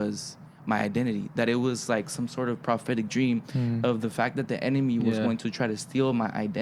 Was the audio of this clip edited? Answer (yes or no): no